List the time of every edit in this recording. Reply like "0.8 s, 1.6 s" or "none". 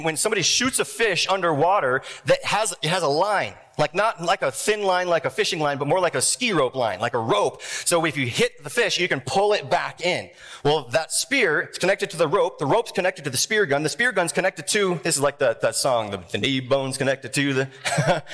none